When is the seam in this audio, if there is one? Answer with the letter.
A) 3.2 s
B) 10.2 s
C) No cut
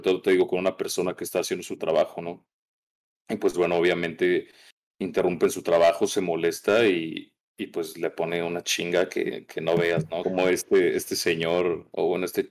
B